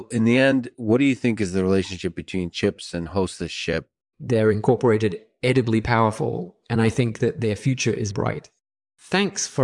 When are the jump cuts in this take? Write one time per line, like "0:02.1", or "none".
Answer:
0:04.1
0:08.1